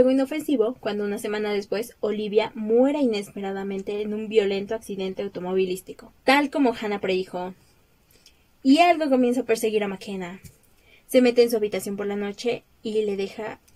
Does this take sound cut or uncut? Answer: cut